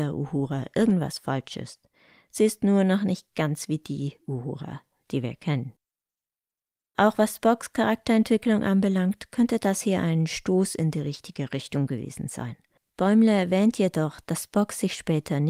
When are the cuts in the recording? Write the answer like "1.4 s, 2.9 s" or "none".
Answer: 12.8 s